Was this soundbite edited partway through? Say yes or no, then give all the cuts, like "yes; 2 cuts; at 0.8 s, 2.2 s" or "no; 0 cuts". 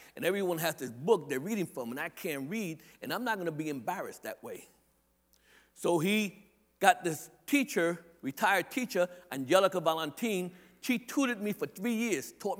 no; 0 cuts